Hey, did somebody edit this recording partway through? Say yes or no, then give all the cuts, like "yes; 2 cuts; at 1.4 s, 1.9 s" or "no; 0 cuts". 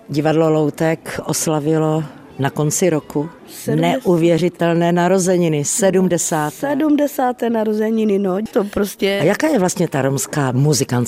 yes; 1 cut; at 8.5 s